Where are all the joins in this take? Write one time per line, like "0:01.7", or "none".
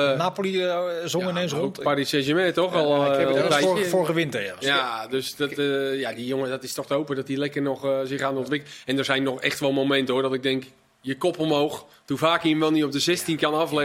none